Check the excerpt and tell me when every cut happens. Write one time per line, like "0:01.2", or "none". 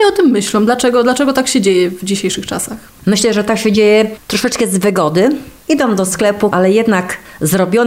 0:06.5